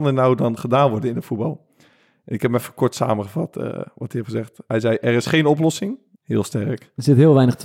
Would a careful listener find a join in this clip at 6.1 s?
yes; 1 cut; at 6.1 s

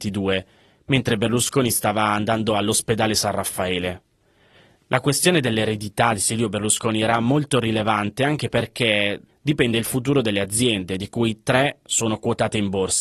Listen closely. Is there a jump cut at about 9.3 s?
yes; 1 cut; at 9.3 s

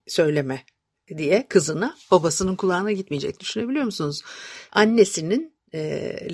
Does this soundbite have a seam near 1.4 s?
no; 1 cut; at 4.7 s

